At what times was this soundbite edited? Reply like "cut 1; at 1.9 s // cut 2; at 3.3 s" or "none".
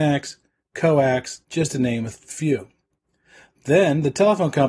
cut 1; at 1.4 s